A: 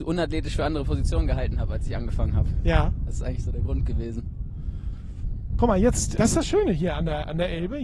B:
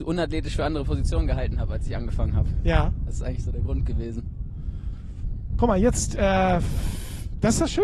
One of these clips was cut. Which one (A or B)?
A